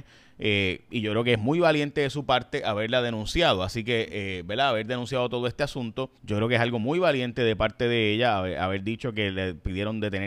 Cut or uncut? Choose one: cut